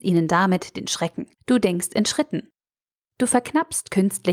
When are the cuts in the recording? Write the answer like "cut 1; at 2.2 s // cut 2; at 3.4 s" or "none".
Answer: cut 1; at 1.3 s